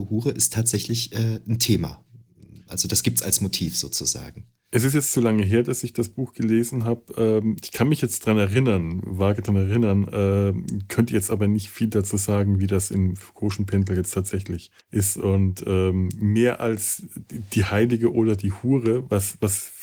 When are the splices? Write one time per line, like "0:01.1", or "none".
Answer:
0:14.8